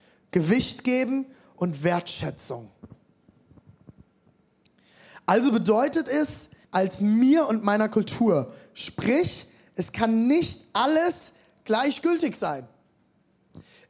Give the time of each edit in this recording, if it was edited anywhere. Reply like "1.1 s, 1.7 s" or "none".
6.6 s